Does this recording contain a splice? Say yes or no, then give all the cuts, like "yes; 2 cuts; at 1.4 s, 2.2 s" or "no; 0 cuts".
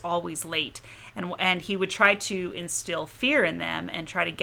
no; 0 cuts